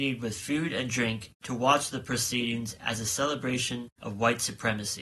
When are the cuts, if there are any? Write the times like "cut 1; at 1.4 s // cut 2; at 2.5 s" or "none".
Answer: none